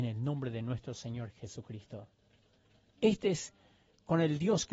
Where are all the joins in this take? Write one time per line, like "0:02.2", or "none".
0:02.9